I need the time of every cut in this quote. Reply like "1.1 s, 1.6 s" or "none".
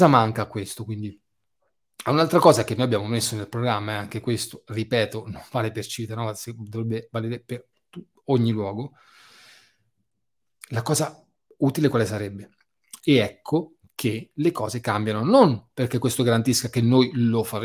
13.0 s